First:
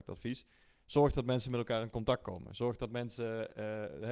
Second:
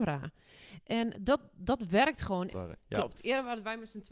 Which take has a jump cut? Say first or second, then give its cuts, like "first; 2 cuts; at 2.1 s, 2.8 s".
second; 2 cuts; at 1.1 s, 2.5 s